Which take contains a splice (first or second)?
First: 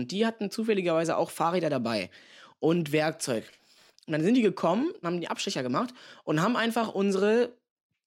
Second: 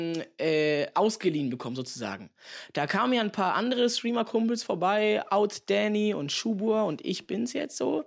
first